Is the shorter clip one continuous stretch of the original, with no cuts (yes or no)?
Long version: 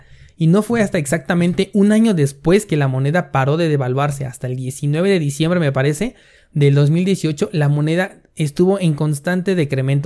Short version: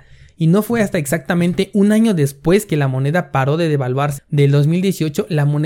no